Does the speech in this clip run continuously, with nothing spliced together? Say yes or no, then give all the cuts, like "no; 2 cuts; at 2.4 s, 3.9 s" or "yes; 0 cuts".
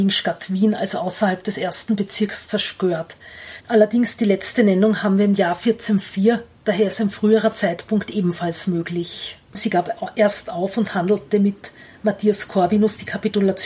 no; 2 cuts; at 3.6 s, 9.5 s